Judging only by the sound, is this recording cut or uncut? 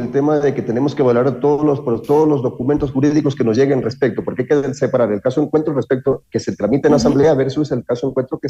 uncut